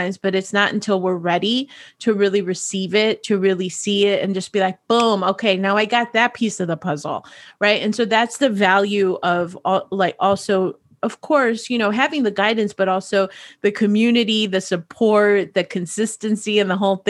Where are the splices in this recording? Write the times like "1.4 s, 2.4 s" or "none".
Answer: none